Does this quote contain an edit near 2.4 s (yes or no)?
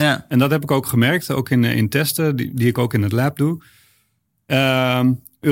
no